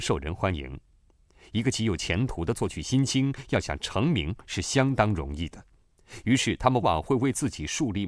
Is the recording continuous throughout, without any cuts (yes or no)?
no